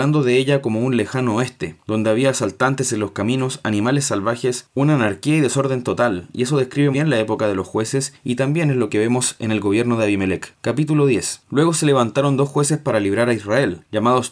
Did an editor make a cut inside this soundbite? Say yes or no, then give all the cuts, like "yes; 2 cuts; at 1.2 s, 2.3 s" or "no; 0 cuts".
yes; 1 cut; at 6.9 s